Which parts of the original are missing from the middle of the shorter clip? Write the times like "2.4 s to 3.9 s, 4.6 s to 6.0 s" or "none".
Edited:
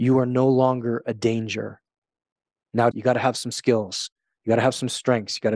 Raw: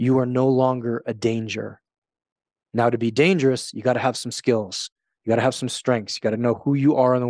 2.9 s to 3.7 s